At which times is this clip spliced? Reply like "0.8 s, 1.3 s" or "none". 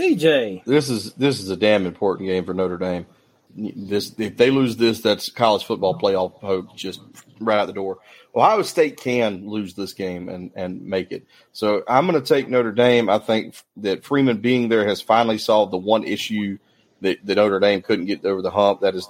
3.5 s